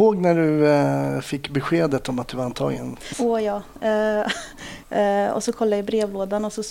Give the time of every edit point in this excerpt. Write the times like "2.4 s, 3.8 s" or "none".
3.1 s, 4.8 s